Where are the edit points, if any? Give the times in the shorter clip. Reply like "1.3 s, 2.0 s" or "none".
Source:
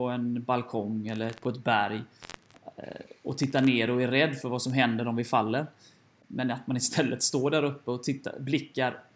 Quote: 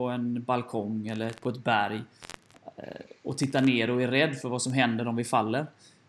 none